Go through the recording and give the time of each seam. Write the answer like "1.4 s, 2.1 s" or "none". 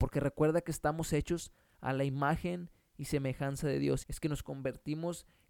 4.0 s

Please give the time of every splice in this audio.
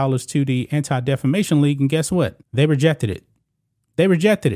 2.4 s

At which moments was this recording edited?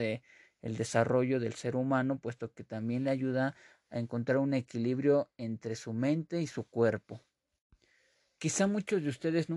none

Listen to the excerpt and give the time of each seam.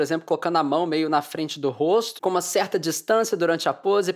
2.2 s

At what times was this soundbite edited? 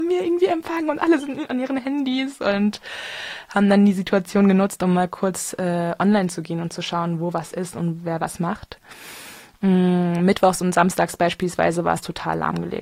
none

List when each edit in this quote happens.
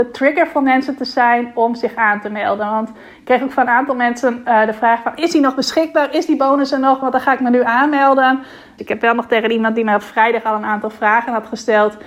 7.0 s, 8.8 s

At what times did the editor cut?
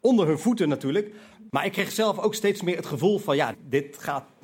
1.5 s, 3.5 s

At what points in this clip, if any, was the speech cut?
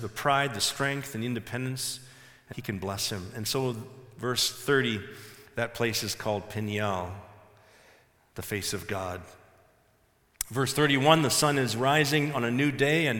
2.5 s

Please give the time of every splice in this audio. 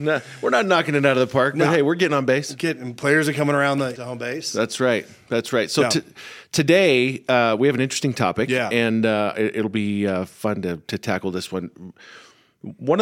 3.9 s

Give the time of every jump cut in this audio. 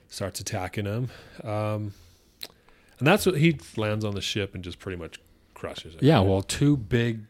3.7 s

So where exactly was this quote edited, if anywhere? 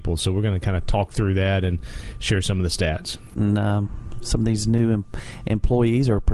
3.3 s

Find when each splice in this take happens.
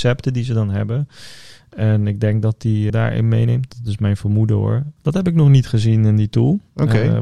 2.9 s, 5.0 s

